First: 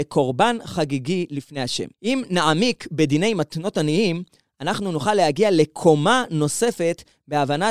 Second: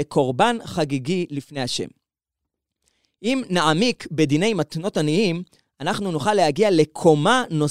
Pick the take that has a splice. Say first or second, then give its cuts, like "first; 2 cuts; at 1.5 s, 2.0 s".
first; 1 cut; at 1.9 s